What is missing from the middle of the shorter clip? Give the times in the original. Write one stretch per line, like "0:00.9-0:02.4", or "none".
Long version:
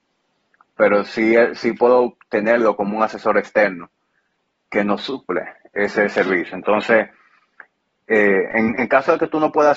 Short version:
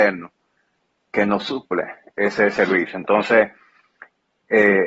none